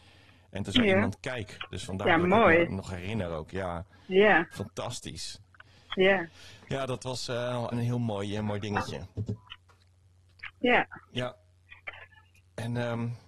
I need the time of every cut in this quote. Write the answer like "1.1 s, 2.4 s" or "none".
1.7 s, 7.7 s